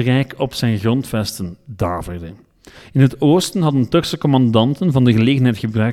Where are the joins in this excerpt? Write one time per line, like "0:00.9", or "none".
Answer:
none

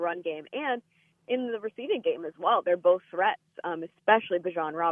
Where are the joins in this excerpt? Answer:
none

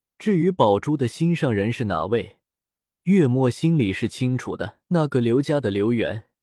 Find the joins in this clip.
0:04.8

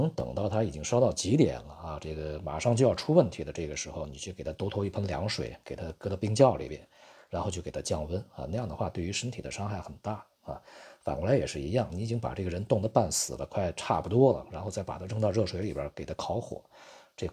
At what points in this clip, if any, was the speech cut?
none

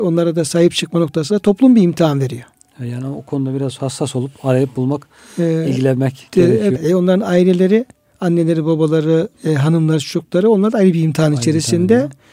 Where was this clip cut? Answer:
0:06.8
0:09.3

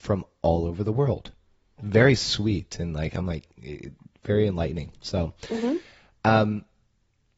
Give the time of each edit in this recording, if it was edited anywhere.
0:01.8

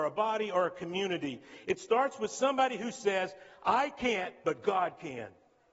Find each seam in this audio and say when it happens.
none

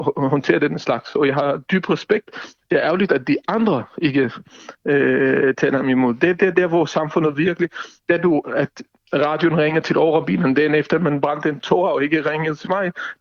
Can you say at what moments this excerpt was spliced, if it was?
none

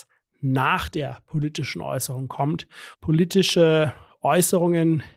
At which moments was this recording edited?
0:02.9

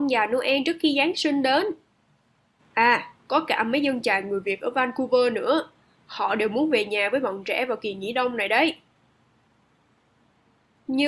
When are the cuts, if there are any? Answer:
0:02.6

